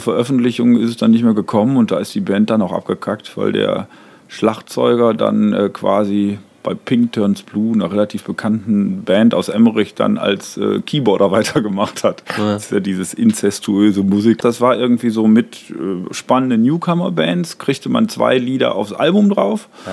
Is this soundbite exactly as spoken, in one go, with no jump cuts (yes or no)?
no